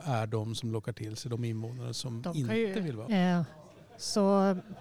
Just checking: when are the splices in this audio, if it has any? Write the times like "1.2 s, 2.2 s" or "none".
3.1 s